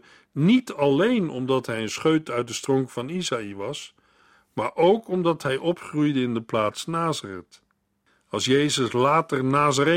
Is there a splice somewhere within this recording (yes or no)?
no